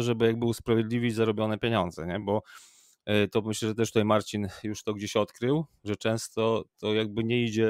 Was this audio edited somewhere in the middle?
no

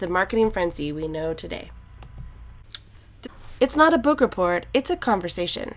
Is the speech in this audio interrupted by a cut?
yes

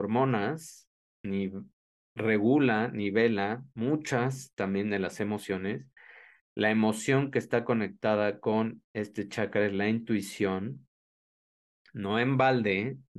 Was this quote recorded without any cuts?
yes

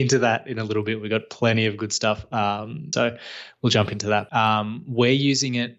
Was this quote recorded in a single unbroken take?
no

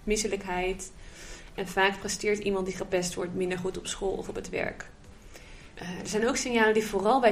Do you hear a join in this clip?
yes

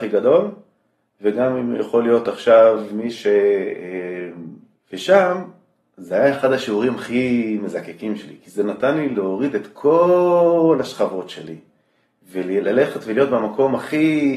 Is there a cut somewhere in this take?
yes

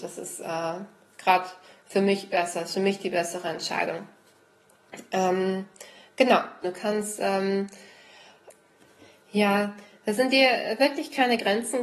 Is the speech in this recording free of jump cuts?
no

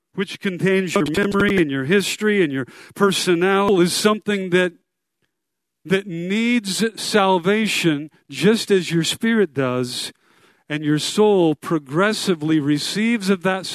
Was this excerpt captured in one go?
yes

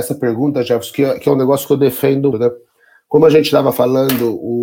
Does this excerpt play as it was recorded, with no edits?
no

